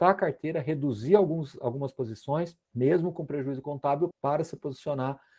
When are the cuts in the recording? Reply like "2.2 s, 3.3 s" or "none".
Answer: 2.7 s, 4.1 s